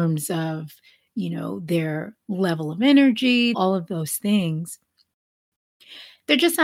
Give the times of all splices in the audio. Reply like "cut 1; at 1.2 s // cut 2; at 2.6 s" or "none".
cut 1; at 3.5 s